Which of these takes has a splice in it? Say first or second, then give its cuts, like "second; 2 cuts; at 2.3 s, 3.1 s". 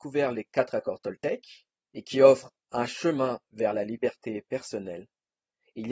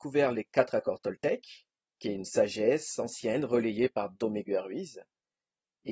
first; 1 cut; at 1.7 s